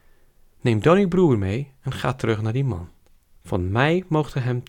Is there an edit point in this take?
yes; 1 cut; at 3.4 s

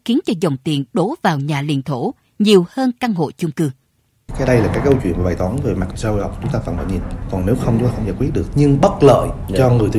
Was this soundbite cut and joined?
yes; 2 cuts; at 7.3 s, 8.5 s

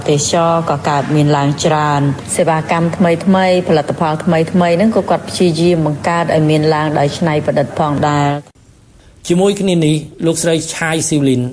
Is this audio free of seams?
yes; 0 cuts

